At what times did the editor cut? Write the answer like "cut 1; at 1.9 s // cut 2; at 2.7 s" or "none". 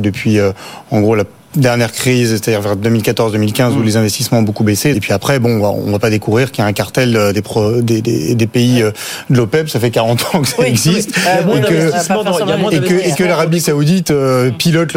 cut 1; at 4.9 s

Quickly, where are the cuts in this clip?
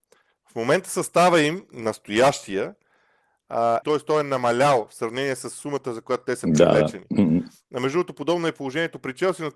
cut 1; at 3.8 s

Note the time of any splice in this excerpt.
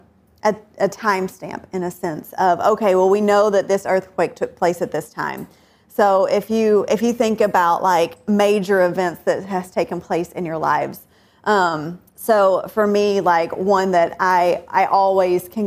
cut 1; at 12.1 s

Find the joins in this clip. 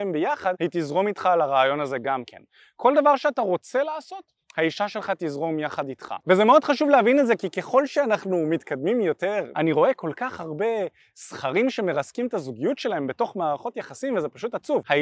cut 1; at 6.2 s // cut 2; at 9.5 s

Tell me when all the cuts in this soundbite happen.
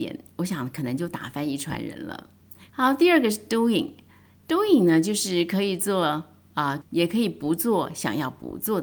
cut 1; at 2.7 s // cut 2; at 6.8 s

